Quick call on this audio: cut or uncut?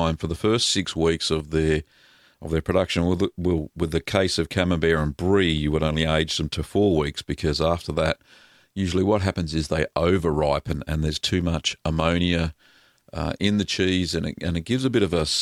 uncut